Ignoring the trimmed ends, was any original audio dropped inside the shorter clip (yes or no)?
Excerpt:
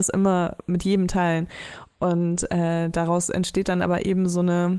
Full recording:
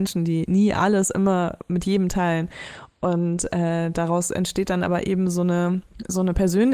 no